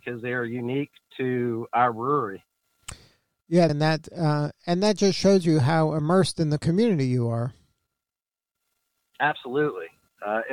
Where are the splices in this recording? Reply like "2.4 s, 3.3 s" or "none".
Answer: 3.7 s